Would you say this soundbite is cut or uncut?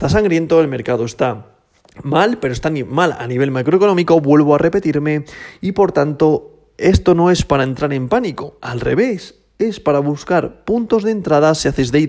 uncut